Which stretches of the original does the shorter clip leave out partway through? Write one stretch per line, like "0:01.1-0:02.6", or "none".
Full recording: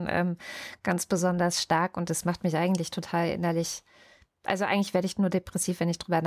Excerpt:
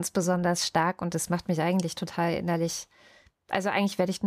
none